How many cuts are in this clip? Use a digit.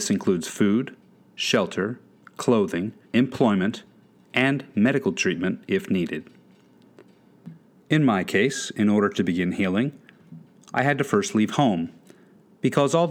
1